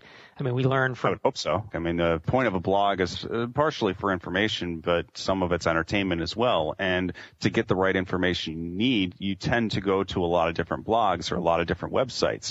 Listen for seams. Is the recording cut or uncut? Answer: cut